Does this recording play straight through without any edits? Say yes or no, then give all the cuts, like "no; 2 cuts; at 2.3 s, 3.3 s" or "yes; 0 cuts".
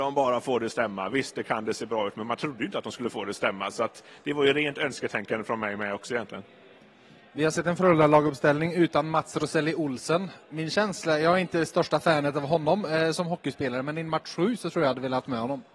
yes; 0 cuts